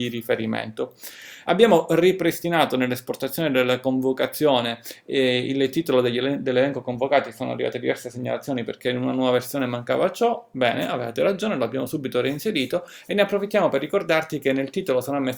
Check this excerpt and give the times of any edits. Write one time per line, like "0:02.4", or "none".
0:01.4